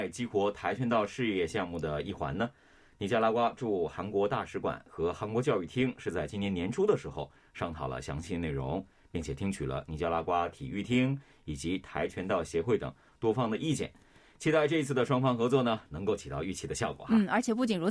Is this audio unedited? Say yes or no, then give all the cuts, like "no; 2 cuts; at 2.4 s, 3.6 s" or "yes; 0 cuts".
yes; 0 cuts